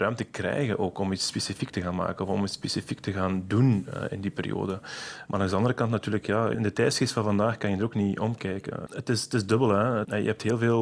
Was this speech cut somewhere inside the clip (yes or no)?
yes